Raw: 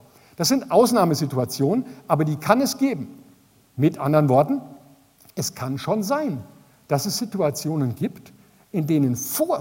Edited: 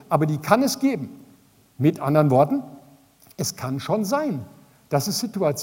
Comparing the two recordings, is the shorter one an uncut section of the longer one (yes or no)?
yes